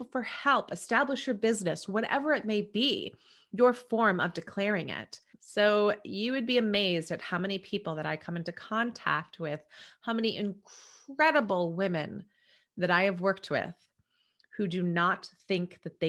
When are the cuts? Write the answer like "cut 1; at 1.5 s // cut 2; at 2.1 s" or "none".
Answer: cut 1; at 5.3 s